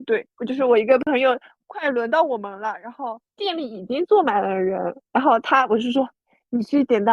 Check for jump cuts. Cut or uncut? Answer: uncut